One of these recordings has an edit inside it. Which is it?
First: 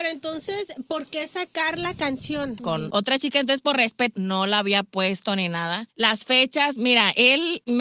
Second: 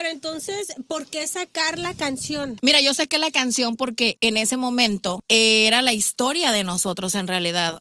first; 2 cuts; at 2.6 s, 4.1 s

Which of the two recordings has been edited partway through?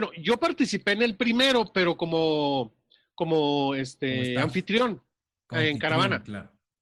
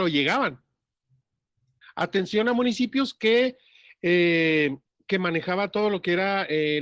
second; 1 cut; at 1.8 s

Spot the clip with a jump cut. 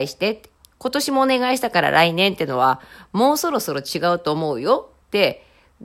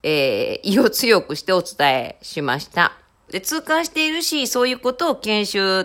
second; 1 cut; at 3.3 s

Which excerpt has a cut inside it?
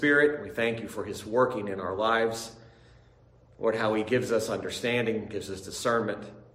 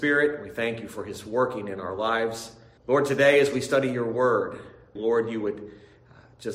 second; 2 cuts; at 2.8 s, 5.0 s

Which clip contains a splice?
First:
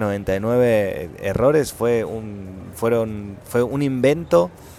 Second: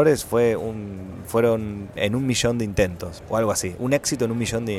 second; 2 cuts; at 2.0 s, 3.2 s

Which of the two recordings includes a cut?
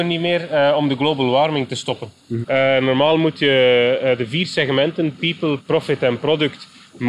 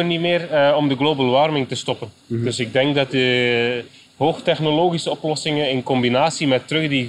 first; 2 cuts; at 2.4 s, 5.6 s

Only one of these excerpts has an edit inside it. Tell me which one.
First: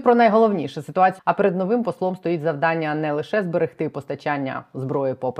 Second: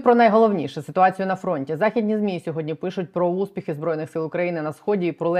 first; 1 cut; at 1.2 s

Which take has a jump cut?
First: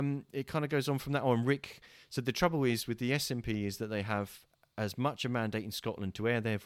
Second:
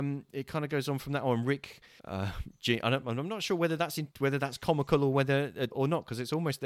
second; 3 cuts; at 2.0 s, 4.1 s, 5.7 s

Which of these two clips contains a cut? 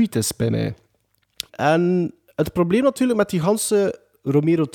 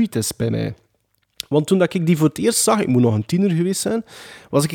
first; 1 cut; at 1.5 s

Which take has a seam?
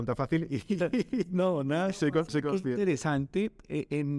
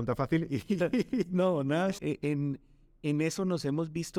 second; 1 cut; at 2.0 s

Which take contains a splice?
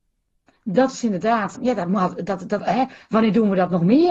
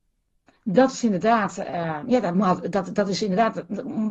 first; 2 cuts; at 1.5 s, 2.6 s

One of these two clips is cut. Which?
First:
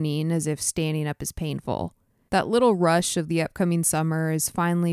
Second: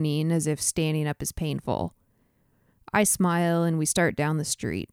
first; 1 cut; at 2.3 s

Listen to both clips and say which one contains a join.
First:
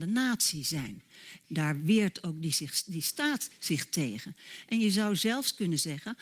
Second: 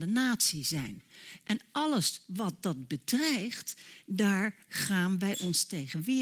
first; 1 cut; at 1.4 s

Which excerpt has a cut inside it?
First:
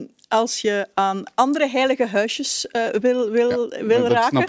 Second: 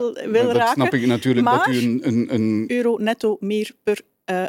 second; 1 cut; at 2.7 s

